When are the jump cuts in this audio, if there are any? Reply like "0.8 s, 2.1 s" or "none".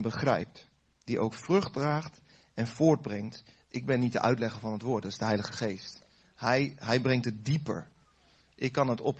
3.6 s